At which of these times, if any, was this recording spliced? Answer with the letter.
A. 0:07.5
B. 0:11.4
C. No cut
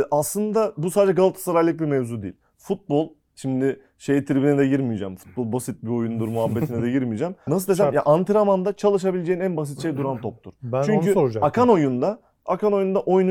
A